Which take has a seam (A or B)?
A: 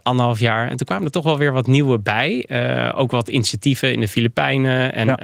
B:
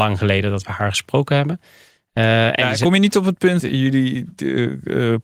B